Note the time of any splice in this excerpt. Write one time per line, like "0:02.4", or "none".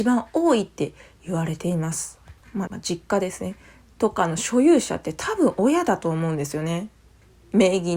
0:02.7